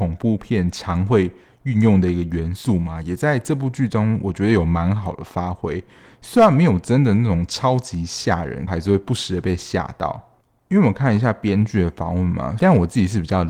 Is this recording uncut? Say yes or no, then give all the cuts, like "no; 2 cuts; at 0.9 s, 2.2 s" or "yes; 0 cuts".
no; 2 cuts; at 8.7 s, 12.6 s